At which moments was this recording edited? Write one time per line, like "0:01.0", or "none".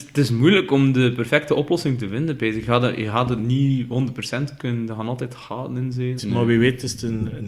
0:06.2